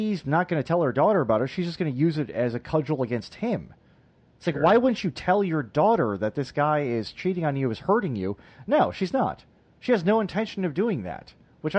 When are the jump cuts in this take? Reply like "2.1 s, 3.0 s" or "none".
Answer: none

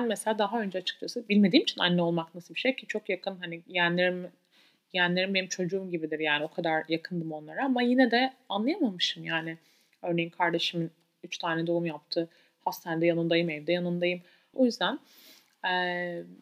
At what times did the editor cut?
14.5 s

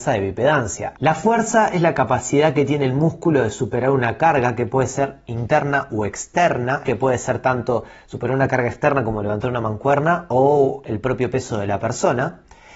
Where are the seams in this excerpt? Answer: 0.9 s, 6.8 s

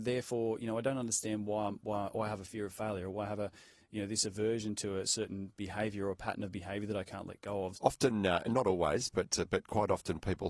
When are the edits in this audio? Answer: 7.7 s

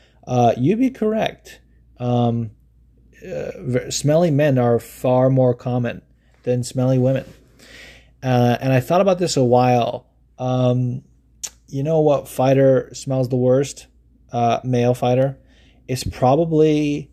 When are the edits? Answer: none

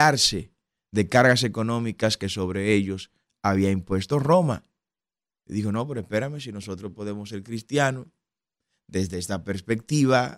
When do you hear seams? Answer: none

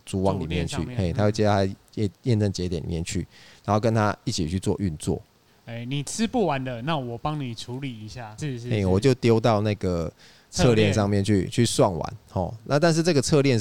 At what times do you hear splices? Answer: 5.5 s, 8.4 s

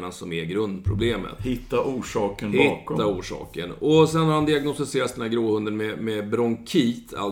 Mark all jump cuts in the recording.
none

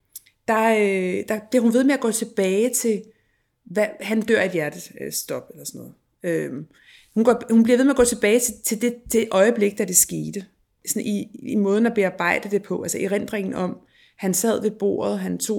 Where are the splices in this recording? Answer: none

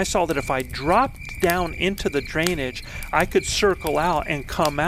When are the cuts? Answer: none

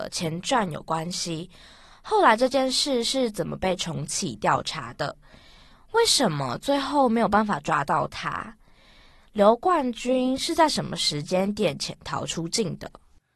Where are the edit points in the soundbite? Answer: none

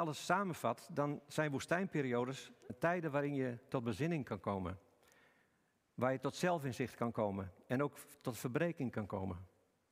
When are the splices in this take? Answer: 2.7 s

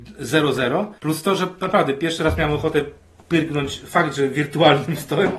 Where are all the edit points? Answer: 1.0 s

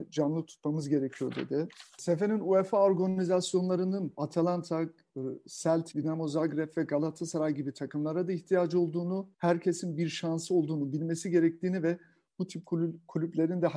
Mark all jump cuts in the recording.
5.9 s, 9.3 s

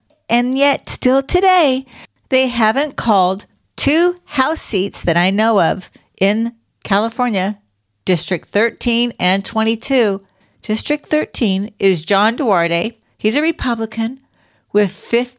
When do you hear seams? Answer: none

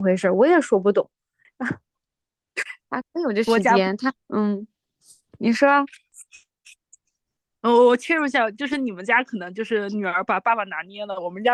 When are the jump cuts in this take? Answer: 1.4 s, 3.0 s, 4.2 s

